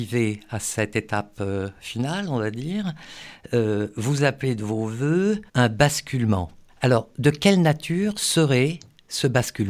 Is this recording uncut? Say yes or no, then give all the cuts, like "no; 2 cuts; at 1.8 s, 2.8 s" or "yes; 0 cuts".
no; 1 cut; at 5.5 s